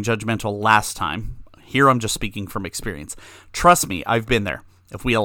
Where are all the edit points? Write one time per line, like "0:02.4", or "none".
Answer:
none